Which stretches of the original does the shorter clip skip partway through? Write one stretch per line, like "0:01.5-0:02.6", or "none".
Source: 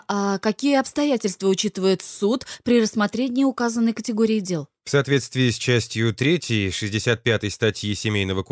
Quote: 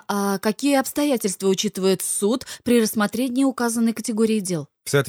none